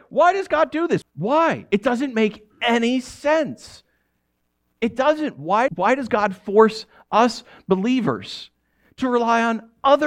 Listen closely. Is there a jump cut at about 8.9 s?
no; 2 cuts; at 1.0 s, 5.7 s

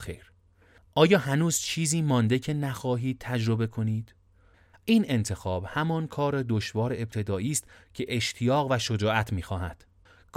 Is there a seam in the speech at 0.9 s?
no; 1 cut; at 4.7 s

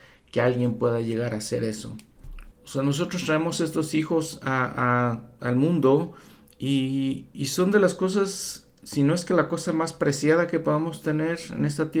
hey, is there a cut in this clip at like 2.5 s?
yes; 1 cut; at 2.5 s

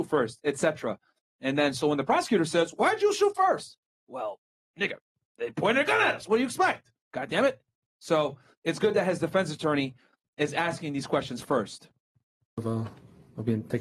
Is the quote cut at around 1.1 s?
no; 0 cuts

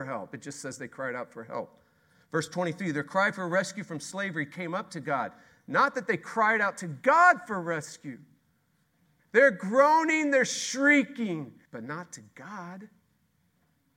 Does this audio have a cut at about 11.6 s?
yes; 2 cuts; at 9.2 s, 11.6 s

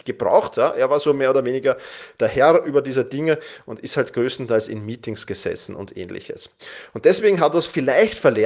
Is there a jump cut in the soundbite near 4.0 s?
no; 0 cuts

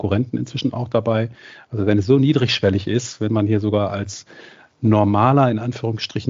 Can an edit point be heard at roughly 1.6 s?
no; 0 cuts

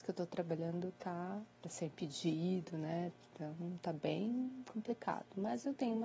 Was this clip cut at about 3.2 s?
no; 1 cut; at 1.5 s

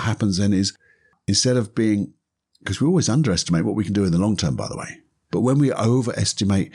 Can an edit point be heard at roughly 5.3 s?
yes; 1 cut; at 5.3 s

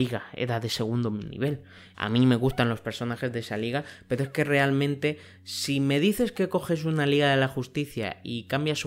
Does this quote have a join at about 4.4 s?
no; 1 cut; at 1.9 s

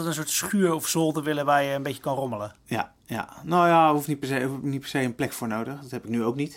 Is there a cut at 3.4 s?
no; 0 cuts

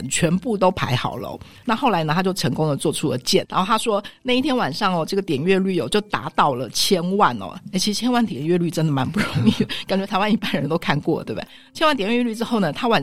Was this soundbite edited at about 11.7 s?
no; 2 cuts; at 1.6 s, 3.4 s

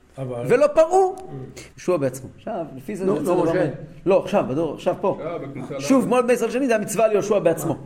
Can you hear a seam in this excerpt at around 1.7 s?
yes; 1 cut; at 1.7 s

